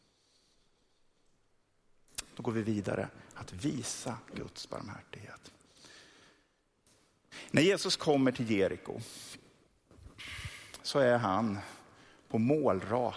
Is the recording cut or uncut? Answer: uncut